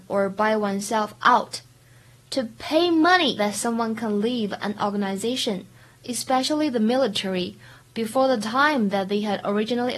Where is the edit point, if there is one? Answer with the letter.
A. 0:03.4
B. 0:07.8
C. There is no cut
A